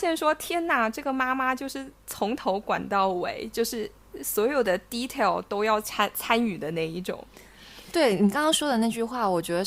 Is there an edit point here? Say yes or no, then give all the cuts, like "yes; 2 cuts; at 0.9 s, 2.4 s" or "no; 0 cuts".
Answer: no; 0 cuts